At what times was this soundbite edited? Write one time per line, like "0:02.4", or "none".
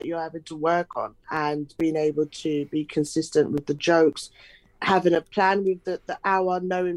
none